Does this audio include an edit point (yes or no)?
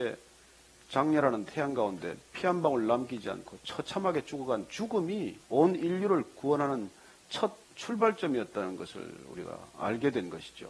yes